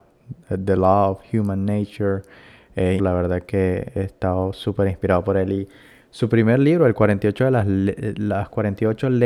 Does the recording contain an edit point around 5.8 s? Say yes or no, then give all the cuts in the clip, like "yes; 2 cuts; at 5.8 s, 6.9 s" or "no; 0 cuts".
no; 1 cut; at 3.0 s